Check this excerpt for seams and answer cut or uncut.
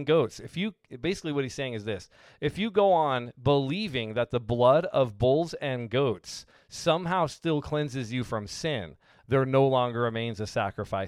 uncut